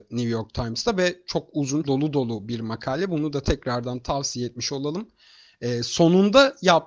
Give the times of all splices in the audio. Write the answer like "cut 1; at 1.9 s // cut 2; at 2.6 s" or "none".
cut 1; at 1.8 s